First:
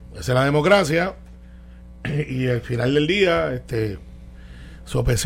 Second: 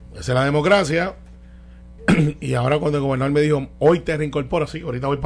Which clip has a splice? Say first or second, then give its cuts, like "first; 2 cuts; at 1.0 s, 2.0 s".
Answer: second; 1 cut; at 2.0 s